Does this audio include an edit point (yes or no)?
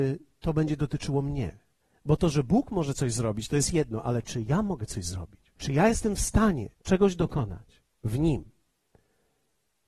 yes